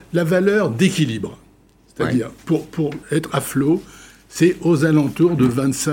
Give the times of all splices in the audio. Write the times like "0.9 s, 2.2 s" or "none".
3.0 s